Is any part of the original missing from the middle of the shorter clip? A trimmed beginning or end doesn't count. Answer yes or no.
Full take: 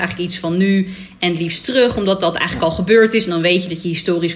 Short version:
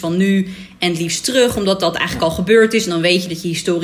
no